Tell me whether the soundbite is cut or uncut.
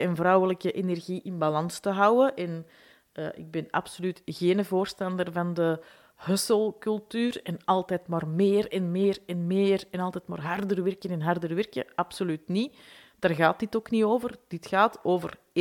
uncut